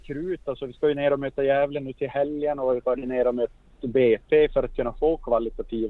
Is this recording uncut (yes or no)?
yes